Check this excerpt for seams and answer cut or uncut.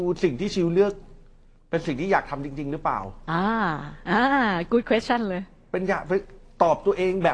uncut